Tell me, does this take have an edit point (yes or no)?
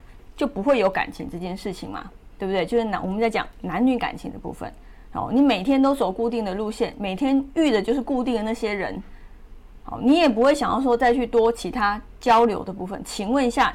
no